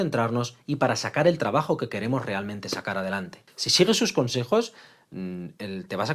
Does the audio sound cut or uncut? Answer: uncut